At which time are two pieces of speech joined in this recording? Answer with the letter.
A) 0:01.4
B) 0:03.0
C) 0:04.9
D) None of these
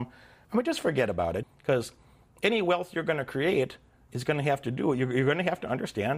A